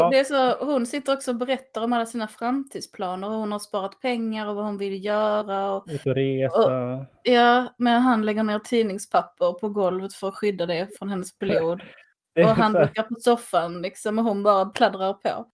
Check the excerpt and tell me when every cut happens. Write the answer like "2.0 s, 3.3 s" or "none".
none